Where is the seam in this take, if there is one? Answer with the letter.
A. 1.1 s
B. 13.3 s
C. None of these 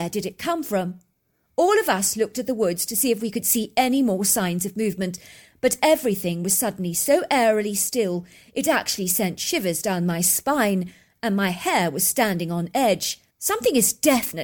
B